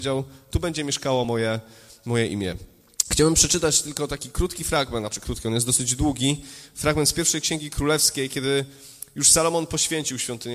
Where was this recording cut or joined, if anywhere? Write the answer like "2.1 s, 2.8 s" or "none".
none